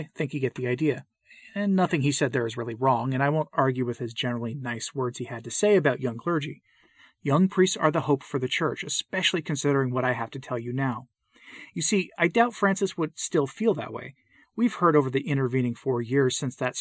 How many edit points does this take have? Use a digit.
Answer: 0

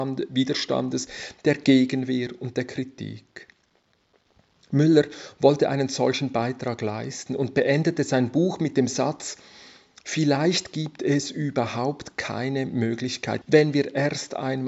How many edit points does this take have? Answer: 1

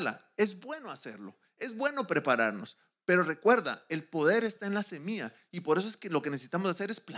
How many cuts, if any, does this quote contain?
0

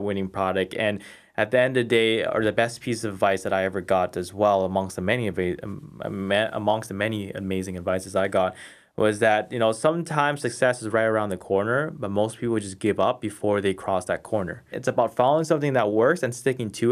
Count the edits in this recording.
1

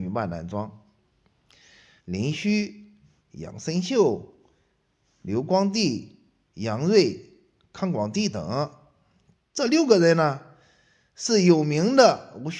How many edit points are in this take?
1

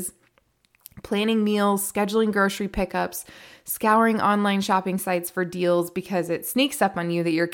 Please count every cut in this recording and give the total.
0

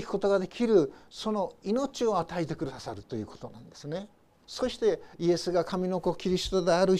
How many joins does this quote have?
1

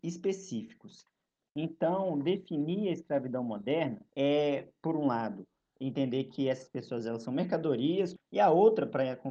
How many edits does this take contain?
2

